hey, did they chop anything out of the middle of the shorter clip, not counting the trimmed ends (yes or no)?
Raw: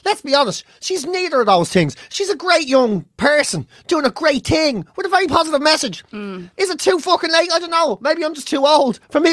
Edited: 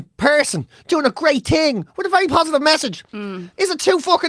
no